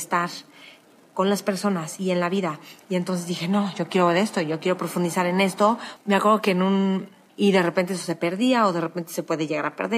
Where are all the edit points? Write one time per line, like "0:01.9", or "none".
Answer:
0:06.0
0:07.3

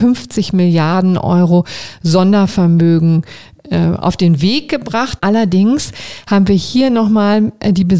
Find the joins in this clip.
0:05.2

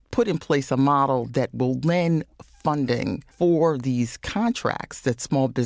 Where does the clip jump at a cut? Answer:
0:03.3

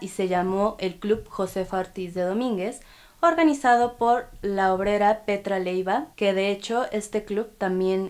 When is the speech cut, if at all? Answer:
0:06.1

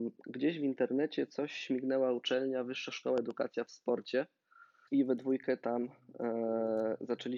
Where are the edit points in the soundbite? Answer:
0:04.9

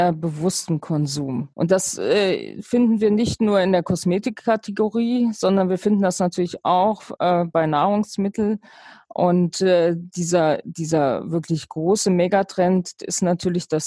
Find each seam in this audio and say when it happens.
0:01.5
0:13.0

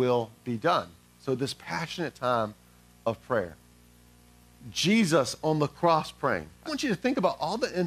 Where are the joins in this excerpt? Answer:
0:06.7

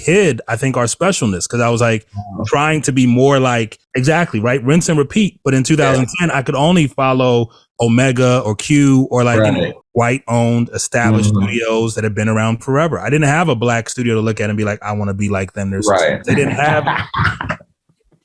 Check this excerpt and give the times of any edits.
0:03.8
0:09.8
0:16.2

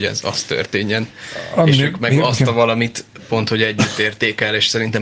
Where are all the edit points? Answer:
none

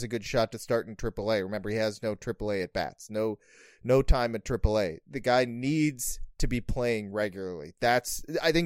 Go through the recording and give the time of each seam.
none

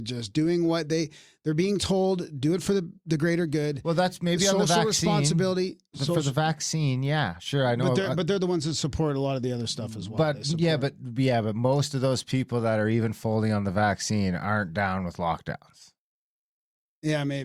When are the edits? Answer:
none

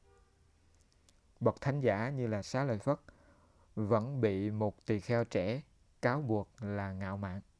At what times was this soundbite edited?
none

